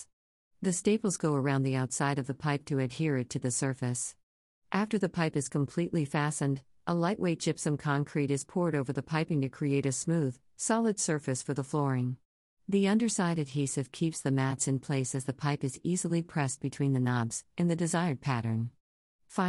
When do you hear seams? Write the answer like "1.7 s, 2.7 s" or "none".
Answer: 12.5 s, 17.5 s